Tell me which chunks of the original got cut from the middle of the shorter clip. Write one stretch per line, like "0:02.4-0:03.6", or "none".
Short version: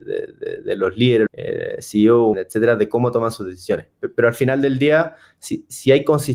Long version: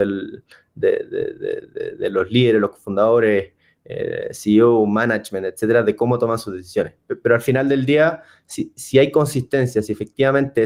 0:02.6-0:03.8
0:04.9-0:05.4